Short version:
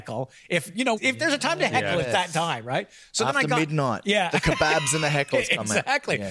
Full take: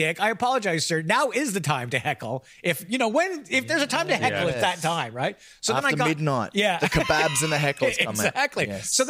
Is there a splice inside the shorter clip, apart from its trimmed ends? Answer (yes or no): yes